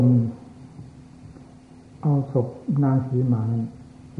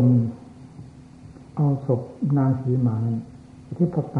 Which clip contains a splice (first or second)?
second